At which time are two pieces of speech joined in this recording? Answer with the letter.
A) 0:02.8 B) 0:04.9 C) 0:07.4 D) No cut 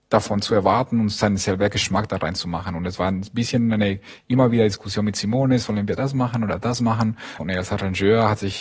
C